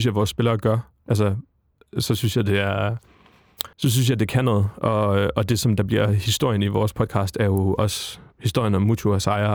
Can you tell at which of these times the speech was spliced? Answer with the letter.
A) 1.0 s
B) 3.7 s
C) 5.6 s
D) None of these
B